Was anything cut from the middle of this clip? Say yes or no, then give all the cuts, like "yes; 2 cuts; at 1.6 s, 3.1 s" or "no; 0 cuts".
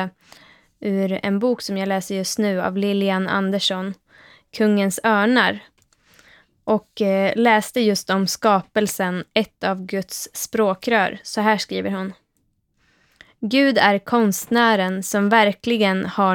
no; 0 cuts